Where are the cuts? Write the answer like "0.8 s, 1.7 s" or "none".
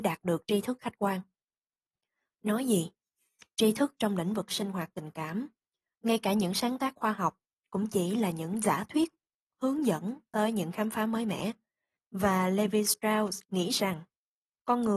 12.0 s, 13.5 s